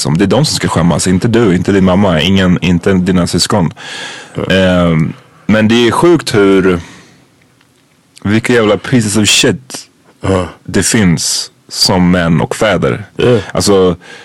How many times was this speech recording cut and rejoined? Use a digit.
0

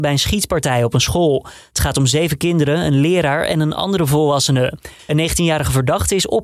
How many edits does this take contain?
1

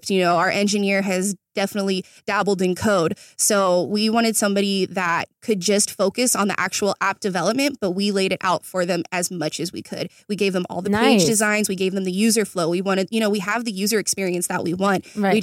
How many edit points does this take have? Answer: 0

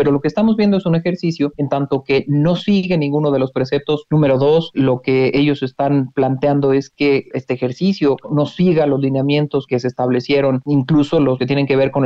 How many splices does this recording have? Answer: 1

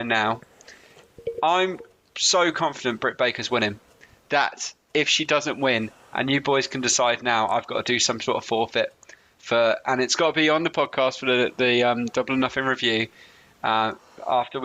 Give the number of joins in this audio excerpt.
0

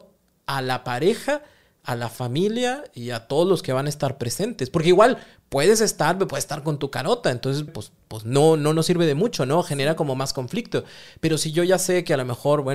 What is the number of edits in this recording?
1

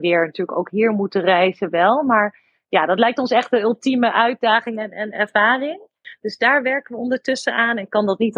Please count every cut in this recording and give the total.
0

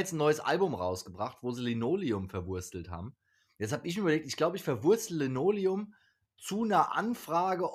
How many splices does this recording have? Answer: 0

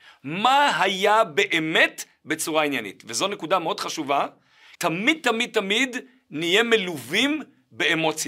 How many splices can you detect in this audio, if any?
1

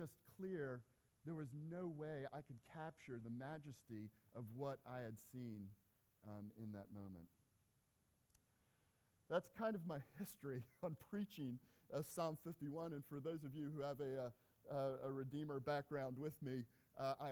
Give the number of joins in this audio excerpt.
0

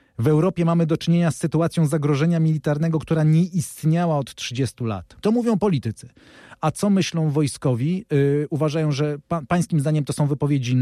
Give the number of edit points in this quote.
1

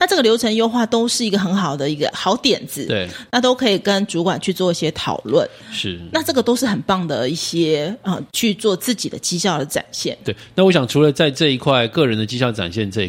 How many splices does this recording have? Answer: 1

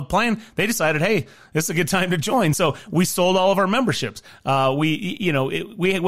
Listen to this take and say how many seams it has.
0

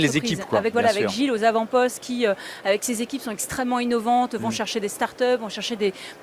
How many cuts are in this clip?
0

